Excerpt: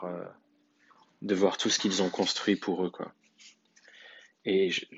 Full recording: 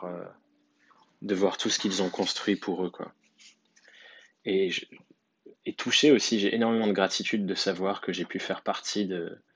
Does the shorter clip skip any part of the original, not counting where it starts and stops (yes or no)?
no